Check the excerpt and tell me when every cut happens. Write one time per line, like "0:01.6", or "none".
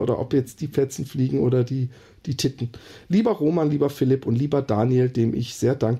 none